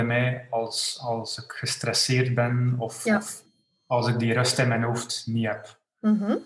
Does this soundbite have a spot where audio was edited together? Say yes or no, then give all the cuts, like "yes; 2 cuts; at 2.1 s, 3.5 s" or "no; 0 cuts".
no; 0 cuts